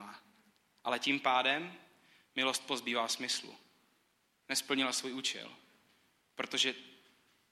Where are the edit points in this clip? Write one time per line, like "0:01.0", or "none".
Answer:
none